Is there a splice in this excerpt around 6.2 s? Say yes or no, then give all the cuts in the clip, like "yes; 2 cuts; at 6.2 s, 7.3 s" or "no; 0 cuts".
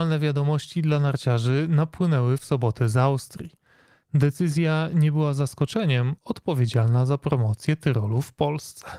yes; 2 cuts; at 4.0 s, 6.2 s